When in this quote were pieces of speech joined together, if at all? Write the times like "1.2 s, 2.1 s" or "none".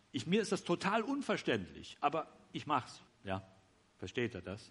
3.1 s